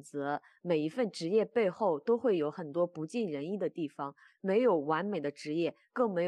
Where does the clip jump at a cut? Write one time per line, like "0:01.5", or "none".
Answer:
0:04.3